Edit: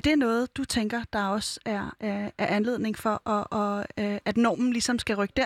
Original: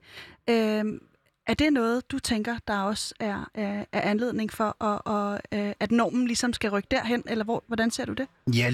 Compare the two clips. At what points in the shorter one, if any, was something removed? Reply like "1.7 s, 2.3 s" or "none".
none